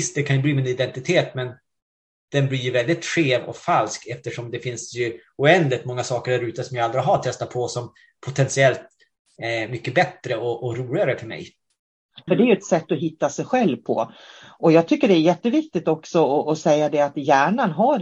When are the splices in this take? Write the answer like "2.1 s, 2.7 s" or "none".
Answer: 12.3 s